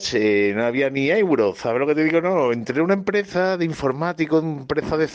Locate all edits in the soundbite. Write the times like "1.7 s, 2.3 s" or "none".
none